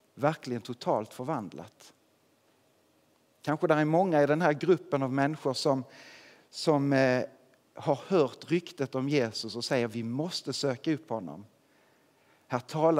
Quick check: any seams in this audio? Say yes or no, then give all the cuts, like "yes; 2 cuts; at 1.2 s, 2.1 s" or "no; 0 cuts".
no; 0 cuts